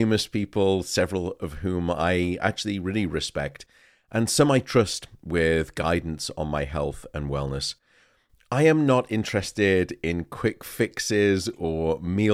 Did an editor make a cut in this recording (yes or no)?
no